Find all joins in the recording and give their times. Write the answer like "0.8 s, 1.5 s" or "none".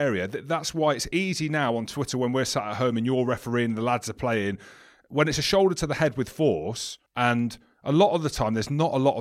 7.1 s